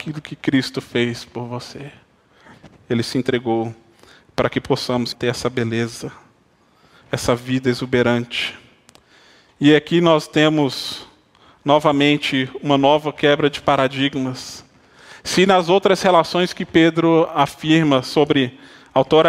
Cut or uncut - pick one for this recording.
cut